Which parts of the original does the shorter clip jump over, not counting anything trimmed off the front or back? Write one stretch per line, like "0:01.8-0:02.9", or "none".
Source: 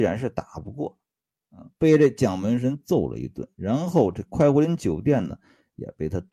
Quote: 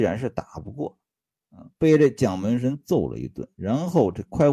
none